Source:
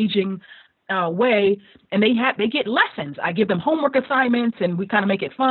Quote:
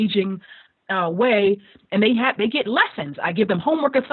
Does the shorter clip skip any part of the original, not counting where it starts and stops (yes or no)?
no